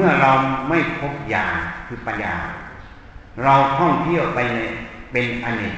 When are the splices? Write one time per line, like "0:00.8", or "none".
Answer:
0:02.1